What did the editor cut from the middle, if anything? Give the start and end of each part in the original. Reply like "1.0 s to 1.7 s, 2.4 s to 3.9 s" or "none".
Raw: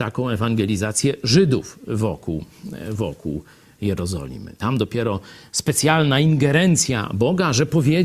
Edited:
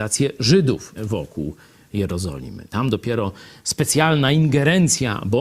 1.8 s to 2.8 s